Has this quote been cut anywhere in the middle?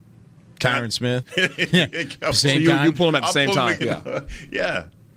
yes; 2 cuts; at 1.2 s, 3.8 s

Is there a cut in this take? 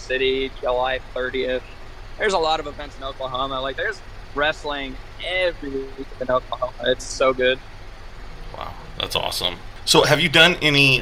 no; 0 cuts

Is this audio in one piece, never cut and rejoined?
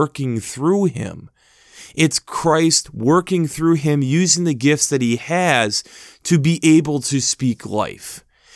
yes; 0 cuts

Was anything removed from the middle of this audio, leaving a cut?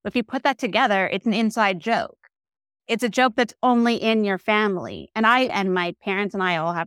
yes; 1 cut; at 5.5 s

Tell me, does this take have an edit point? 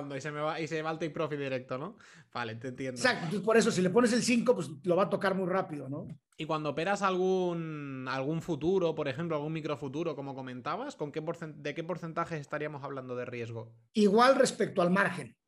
yes; 1 cut; at 13.9 s

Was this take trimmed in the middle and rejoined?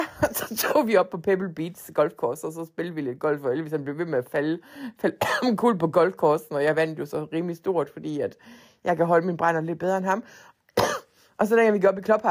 no; 0 cuts

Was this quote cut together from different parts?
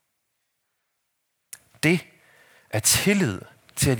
no; 0 cuts

